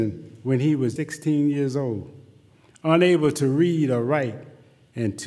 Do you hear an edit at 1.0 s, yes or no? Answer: yes